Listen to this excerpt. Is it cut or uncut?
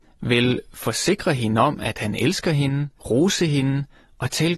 cut